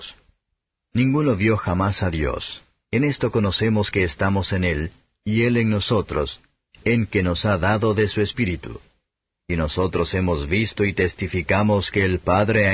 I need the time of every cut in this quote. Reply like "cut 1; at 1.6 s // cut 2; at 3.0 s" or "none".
cut 1; at 2.8 s